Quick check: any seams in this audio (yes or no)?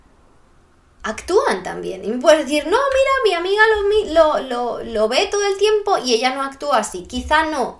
no